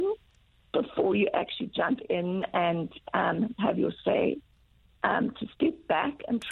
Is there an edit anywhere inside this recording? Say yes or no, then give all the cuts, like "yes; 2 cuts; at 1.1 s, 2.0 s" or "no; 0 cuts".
no; 0 cuts